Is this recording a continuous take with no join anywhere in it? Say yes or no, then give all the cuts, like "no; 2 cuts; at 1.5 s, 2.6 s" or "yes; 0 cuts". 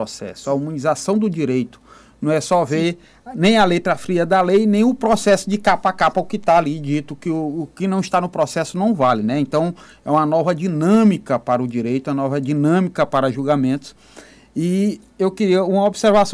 yes; 0 cuts